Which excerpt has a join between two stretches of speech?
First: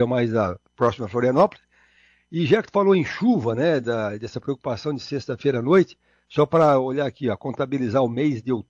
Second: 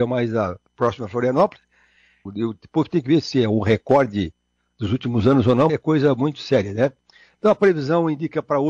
second; 2 cuts; at 2.3 s, 5.7 s

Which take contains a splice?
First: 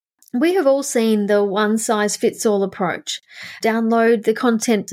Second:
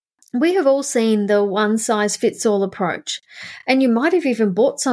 first; 1 cut; at 3.6 s

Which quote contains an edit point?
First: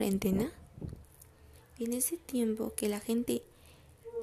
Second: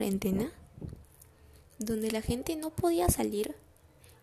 first; 1 cut; at 1.6 s

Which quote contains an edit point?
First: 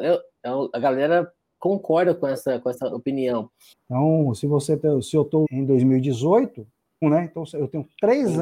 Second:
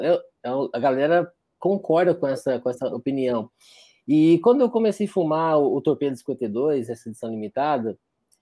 first; 3 cuts; at 3.7 s, 5.4 s, 7.0 s

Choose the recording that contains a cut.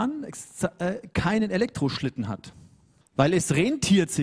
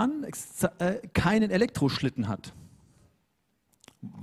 first; 1 cut; at 3.0 s

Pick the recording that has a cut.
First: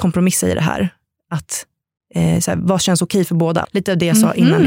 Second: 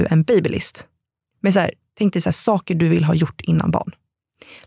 first; 1 cut; at 3.6 s

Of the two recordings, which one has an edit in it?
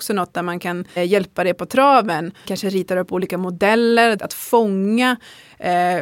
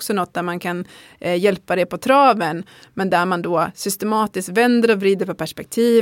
first; 3 cuts; at 1.0 s, 2.4 s, 4.2 s

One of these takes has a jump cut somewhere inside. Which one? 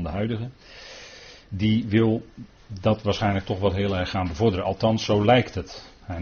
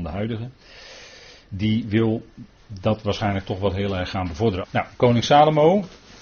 second; 1 cut; at 4.6 s

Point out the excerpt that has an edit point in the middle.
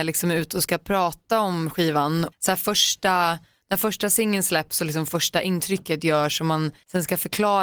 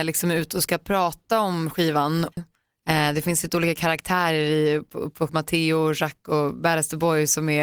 second; 2 cuts; at 2.4 s, 5.3 s

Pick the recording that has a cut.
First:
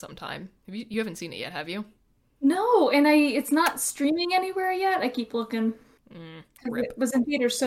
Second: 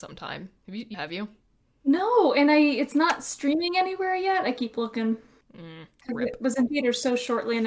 second; 1 cut; at 0.9 s

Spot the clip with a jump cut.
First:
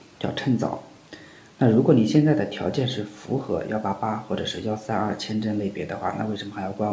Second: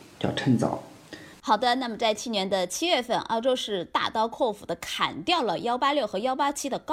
second; 1 cut; at 1.3 s

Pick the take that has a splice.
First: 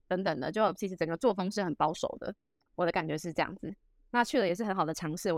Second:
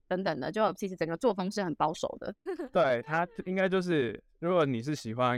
second; 1 cut; at 2.5 s

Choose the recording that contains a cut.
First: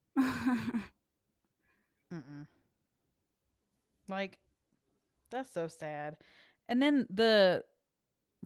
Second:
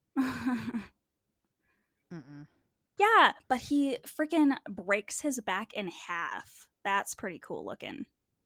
second; 1 cut; at 3.0 s

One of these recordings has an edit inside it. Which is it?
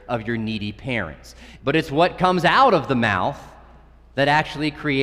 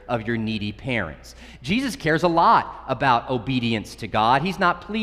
first; 1 cut; at 1.6 s

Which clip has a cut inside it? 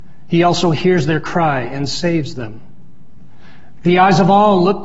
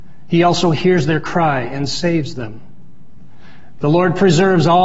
first; 1 cut; at 3.8 s

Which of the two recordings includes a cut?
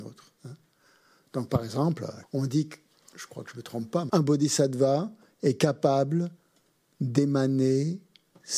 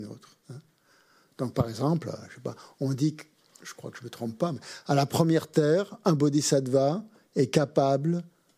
first; 2 cuts; at 2.2 s, 4.1 s

